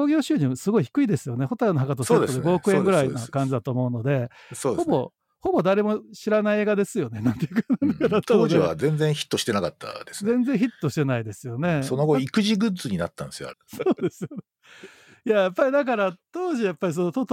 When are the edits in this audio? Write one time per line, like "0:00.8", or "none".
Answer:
0:13.5

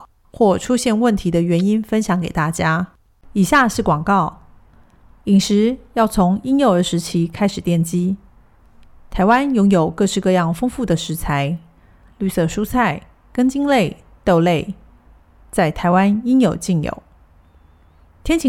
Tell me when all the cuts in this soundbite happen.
0:12.0

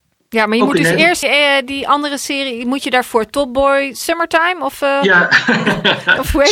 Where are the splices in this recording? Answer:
0:01.2

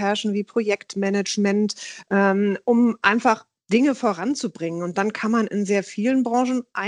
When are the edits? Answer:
none

